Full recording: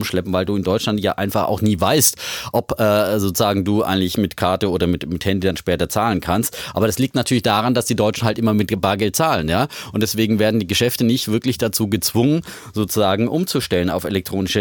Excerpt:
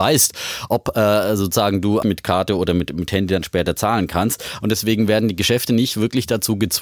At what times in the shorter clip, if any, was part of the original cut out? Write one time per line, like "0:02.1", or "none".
0:02.0
0:04.6